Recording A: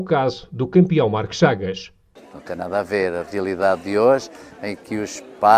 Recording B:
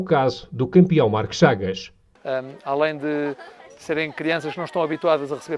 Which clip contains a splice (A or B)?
B